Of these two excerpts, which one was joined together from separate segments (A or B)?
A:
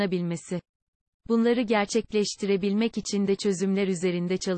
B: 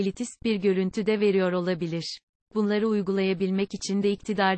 B